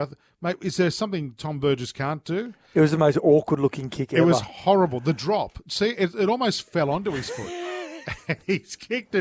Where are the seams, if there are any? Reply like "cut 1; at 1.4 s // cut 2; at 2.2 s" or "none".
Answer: none